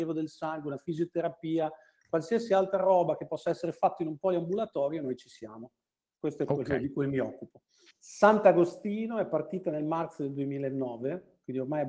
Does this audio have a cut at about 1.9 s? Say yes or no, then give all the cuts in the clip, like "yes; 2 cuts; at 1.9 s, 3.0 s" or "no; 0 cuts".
no; 1 cut; at 7.9 s